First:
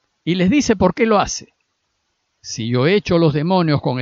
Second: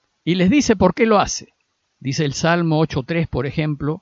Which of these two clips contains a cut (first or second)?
second